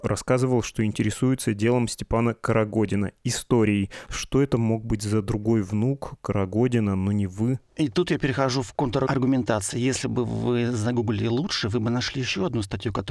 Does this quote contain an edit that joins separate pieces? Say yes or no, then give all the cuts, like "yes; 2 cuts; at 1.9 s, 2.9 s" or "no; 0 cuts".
yes; 1 cut; at 4.1 s